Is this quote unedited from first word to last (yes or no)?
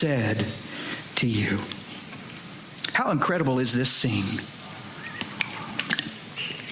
yes